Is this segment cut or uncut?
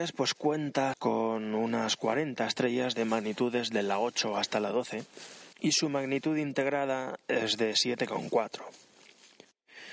cut